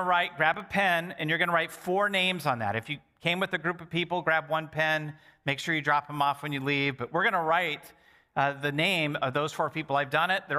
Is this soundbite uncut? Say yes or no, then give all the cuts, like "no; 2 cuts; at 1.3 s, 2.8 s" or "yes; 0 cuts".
yes; 0 cuts